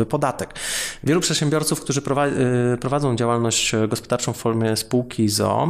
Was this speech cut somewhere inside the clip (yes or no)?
yes